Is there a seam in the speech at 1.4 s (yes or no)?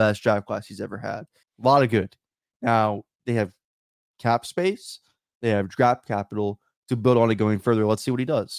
yes